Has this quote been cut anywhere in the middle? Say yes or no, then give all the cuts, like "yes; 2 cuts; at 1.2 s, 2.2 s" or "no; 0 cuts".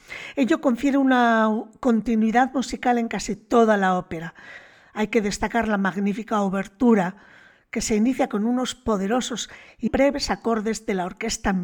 yes; 1 cut; at 9.9 s